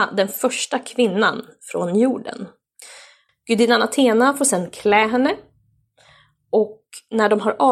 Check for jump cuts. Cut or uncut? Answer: cut